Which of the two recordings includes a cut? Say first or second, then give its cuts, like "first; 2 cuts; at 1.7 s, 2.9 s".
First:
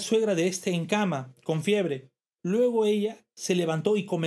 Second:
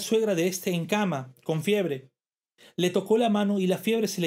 first; 1 cut; at 2.4 s